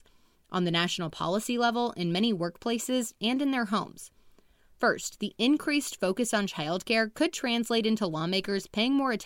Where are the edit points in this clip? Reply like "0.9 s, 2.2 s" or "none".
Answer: none